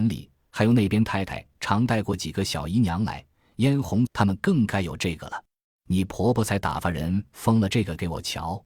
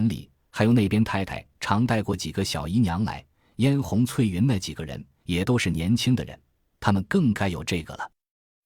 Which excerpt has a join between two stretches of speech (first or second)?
first